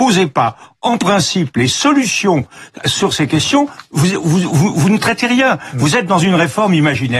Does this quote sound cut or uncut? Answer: uncut